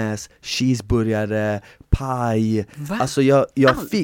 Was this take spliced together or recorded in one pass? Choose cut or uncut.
uncut